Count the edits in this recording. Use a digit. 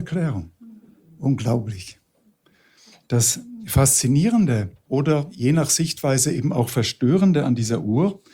0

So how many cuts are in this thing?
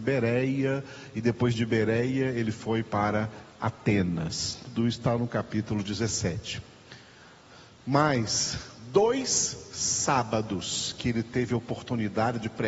0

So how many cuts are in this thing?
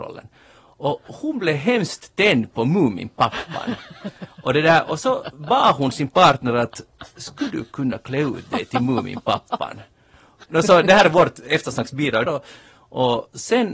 2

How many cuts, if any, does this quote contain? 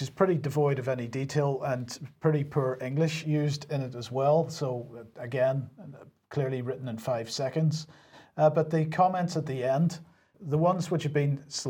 1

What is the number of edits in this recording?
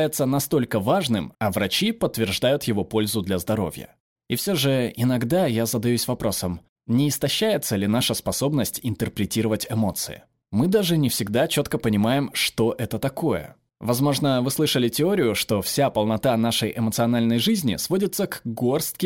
1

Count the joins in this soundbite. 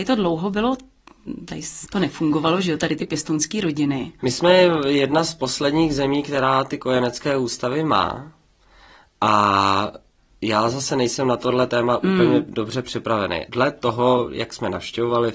2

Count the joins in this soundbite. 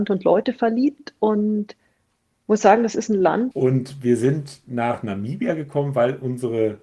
1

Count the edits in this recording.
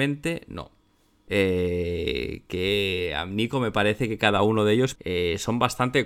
2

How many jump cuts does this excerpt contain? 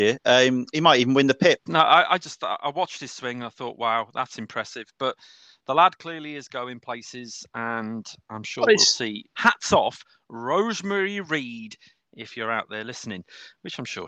2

